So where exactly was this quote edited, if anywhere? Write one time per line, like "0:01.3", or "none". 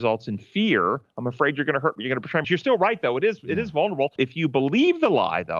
0:02.4
0:04.2